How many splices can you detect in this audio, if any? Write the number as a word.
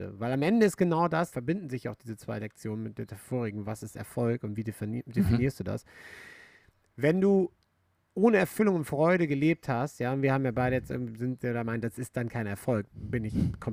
one